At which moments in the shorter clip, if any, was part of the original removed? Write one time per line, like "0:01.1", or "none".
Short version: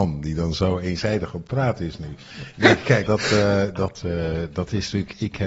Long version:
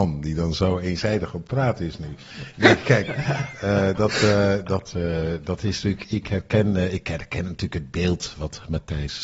0:03.1